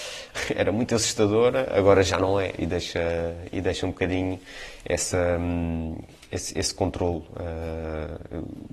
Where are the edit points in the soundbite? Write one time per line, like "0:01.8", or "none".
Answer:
none

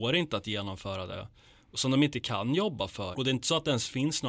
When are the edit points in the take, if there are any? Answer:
0:01.6
0:03.1

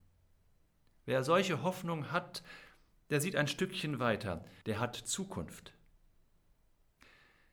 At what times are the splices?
0:04.6

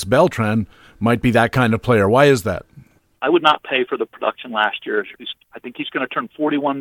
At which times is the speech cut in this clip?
0:03.2
0:05.1

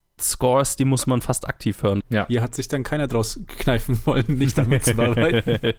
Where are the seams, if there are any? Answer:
0:02.0

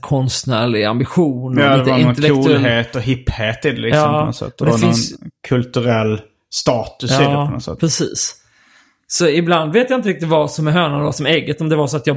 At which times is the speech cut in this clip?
none

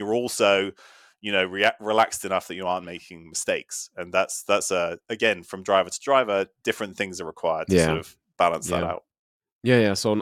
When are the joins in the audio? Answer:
none

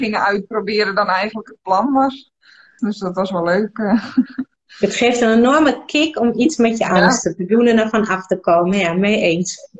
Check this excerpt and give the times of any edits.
0:02.8

